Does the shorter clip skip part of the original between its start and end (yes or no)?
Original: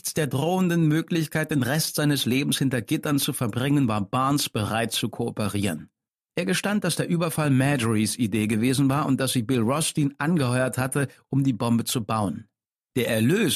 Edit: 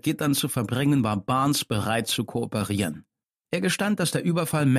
no